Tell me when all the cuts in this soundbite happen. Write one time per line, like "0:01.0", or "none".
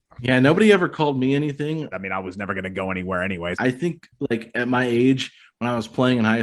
0:01.9
0:03.5